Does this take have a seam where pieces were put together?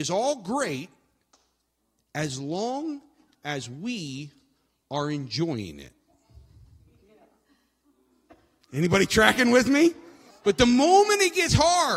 yes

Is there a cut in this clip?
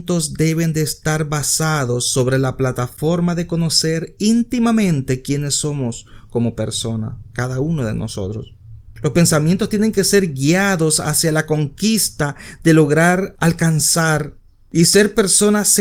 yes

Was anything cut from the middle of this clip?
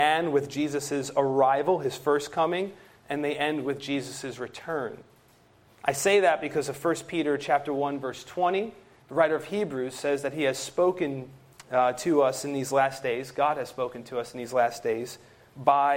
yes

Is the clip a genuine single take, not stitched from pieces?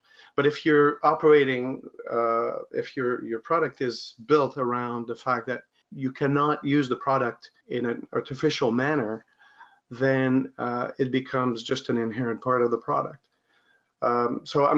yes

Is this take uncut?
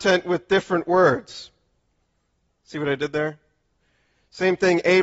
no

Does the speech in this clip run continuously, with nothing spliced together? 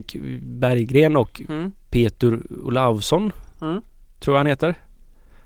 yes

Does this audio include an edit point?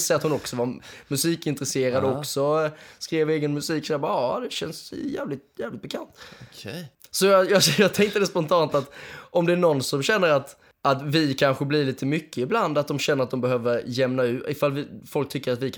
no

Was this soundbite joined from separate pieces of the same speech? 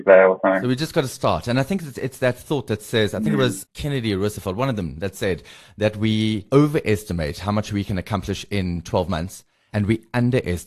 no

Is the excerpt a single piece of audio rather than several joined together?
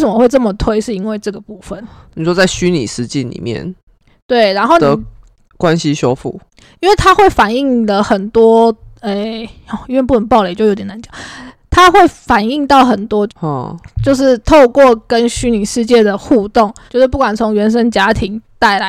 no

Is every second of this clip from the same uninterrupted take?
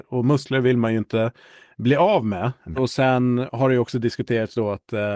no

